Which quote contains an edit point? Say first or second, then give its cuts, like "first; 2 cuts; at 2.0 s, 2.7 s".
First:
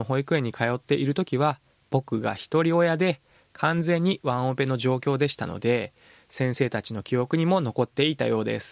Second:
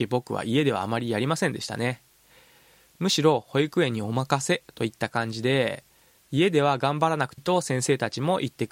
second; 1 cut; at 7.4 s